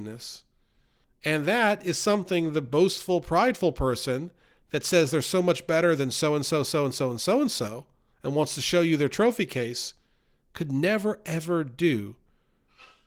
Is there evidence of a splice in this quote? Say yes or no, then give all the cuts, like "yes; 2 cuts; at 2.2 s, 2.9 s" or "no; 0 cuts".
yes; 1 cut; at 1.0 s